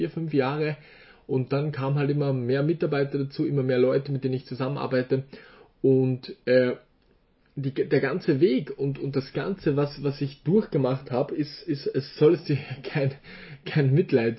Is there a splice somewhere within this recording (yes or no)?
no